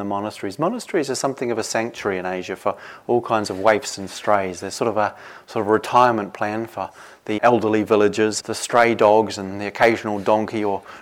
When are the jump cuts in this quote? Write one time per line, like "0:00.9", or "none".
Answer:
0:07.4
0:08.4